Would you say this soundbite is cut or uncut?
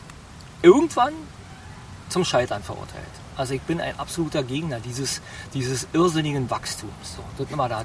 uncut